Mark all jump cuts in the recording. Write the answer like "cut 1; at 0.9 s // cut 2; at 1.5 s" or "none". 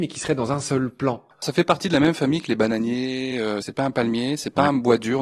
none